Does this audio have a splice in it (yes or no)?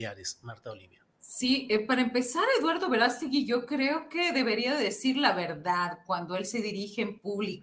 no